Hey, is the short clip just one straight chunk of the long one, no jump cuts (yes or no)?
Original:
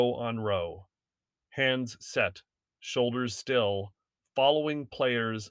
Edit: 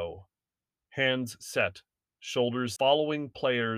no